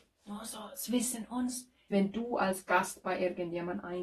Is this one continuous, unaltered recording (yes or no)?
no